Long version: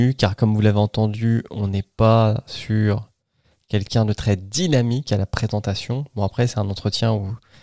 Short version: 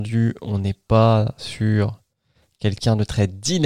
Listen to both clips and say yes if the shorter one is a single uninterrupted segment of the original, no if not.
yes